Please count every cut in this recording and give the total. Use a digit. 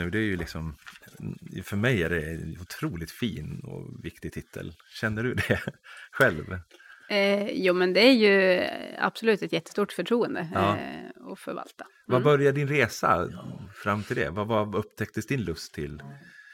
0